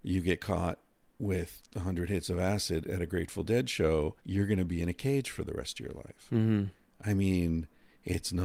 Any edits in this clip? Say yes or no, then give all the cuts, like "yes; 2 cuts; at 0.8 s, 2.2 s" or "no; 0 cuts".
yes; 1 cut; at 4.2 s